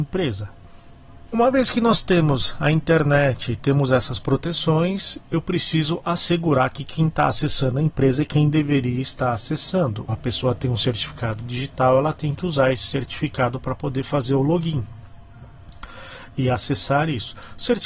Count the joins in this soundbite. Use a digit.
2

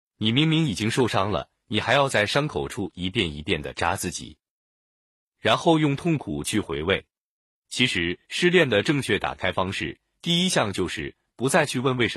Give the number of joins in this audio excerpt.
0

